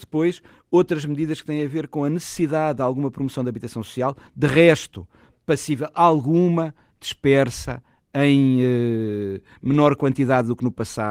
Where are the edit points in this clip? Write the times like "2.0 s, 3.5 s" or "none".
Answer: none